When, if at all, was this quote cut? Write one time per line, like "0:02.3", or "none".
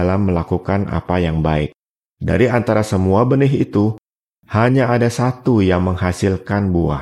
0:02.0